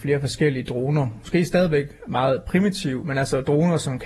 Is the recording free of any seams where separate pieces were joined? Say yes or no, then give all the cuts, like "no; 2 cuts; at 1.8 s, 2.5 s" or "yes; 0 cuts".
yes; 0 cuts